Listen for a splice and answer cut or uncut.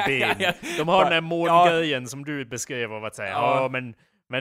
uncut